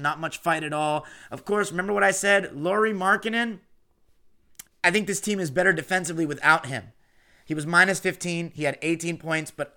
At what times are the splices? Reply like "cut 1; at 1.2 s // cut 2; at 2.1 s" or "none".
cut 1; at 4.6 s

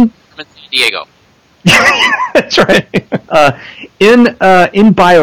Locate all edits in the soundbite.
cut 1; at 3.2 s

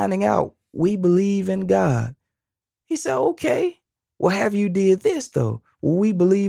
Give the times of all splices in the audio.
none

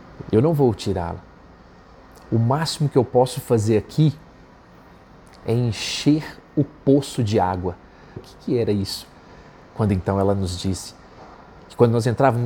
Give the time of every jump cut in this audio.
cut 1; at 8.2 s

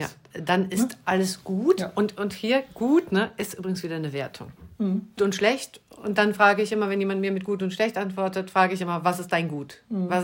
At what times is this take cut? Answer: cut 1; at 5.2 s

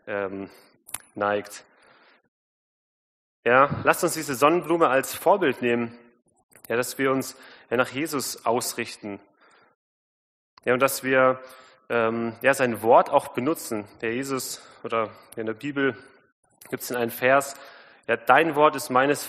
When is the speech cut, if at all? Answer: none

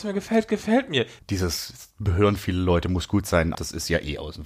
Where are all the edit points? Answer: cut 1; at 1.2 s // cut 2; at 3.5 s

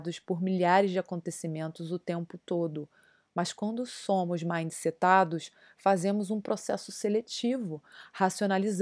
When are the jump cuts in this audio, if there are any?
none

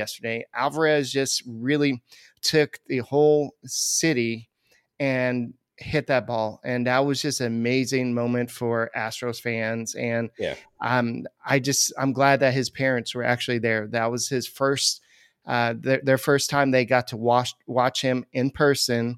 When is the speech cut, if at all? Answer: none

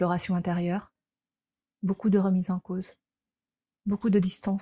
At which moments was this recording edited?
cut 1; at 1.6 s

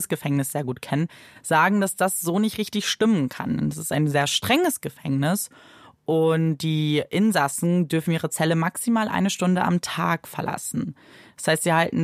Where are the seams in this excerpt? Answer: none

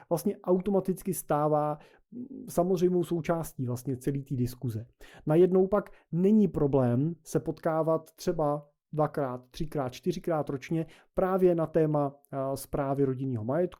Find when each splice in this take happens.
none

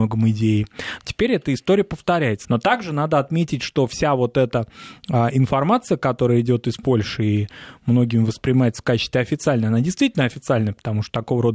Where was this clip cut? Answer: cut 1; at 1.0 s // cut 2; at 2.4 s

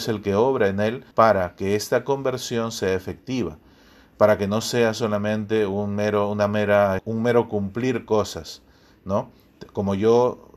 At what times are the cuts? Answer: cut 1; at 1.1 s // cut 2; at 7.0 s

